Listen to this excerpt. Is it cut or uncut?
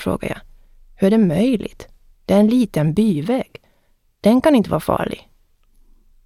uncut